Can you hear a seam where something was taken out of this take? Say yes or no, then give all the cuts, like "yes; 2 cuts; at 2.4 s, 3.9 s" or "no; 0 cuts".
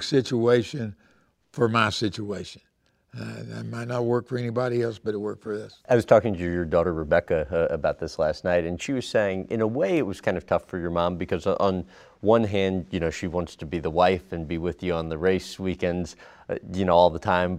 no; 0 cuts